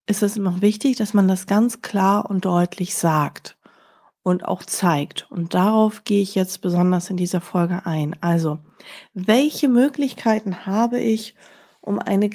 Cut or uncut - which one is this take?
uncut